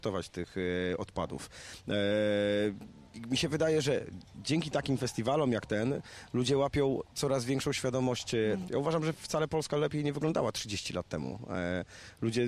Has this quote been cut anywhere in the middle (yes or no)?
yes